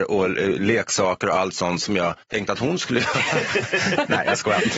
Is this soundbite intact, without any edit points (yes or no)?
no